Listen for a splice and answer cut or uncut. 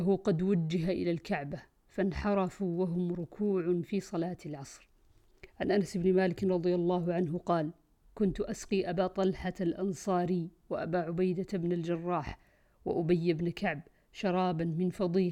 uncut